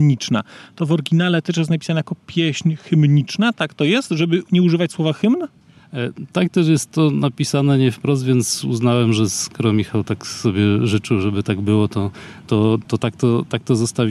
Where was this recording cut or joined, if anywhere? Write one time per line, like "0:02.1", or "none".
0:12.8